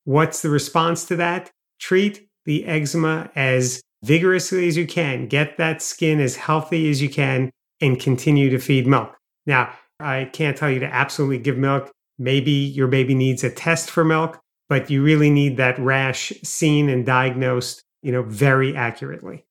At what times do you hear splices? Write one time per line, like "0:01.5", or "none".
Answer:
0:10.0